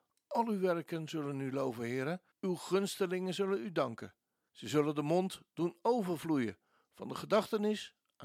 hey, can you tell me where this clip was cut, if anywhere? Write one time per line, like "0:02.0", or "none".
0:02.3
0:04.5

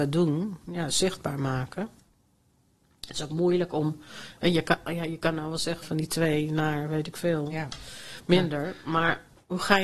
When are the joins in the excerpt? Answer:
0:05.8

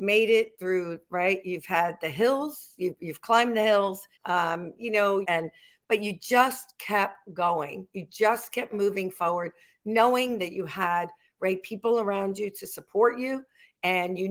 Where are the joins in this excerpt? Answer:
0:04.1
0:05.2

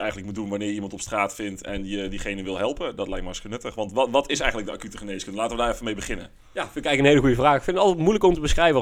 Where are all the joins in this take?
none

